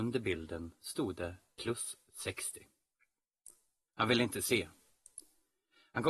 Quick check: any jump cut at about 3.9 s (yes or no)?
yes